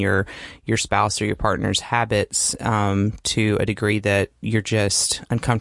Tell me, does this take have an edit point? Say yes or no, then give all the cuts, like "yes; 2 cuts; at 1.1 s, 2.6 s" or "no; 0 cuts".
no; 0 cuts